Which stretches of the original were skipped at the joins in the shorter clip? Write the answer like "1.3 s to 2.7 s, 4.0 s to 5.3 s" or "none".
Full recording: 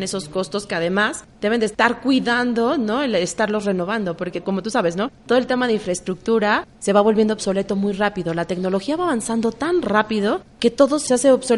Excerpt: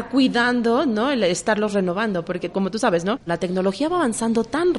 5.2 s to 8.3 s